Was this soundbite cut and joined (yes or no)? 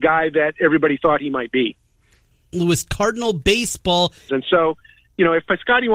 yes